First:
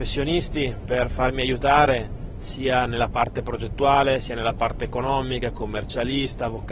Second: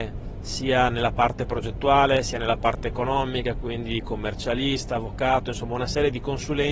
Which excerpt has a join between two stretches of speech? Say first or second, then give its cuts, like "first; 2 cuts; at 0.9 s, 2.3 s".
first; 1 cut; at 5.5 s